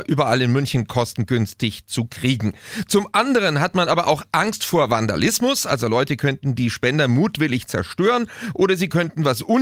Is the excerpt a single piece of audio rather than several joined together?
yes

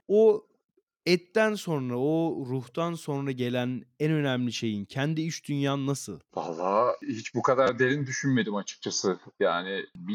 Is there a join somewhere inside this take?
no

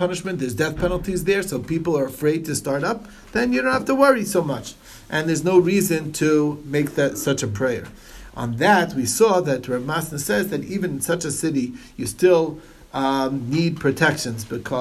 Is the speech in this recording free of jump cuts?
yes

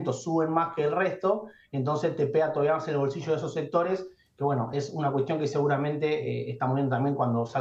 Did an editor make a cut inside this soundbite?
no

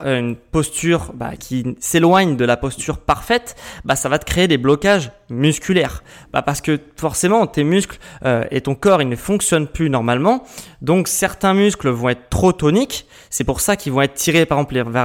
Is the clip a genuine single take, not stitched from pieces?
no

